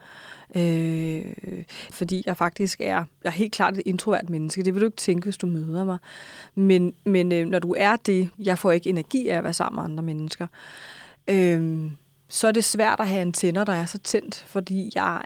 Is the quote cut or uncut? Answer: cut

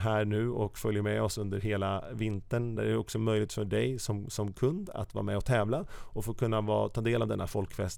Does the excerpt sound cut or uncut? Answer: uncut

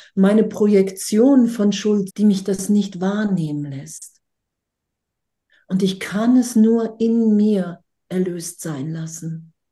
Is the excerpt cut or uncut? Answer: cut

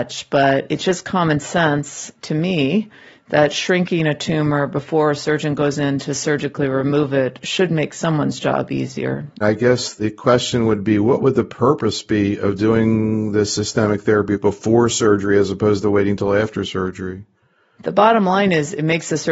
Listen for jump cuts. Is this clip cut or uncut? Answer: cut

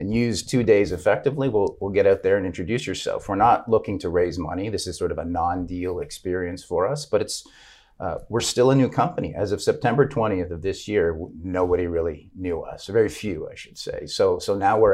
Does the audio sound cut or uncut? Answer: uncut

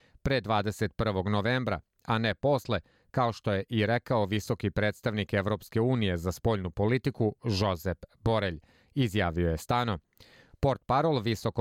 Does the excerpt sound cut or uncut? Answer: uncut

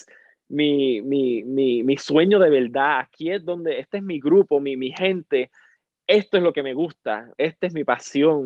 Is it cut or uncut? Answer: uncut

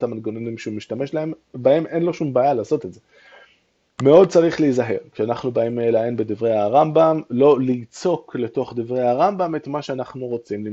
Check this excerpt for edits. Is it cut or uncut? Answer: cut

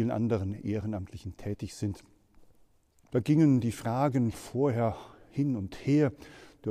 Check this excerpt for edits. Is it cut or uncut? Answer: cut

